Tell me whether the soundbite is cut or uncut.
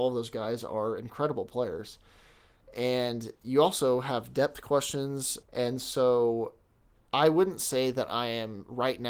cut